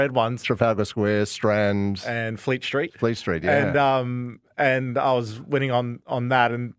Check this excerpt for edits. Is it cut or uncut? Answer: uncut